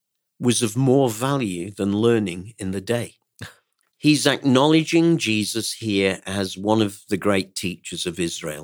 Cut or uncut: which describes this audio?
cut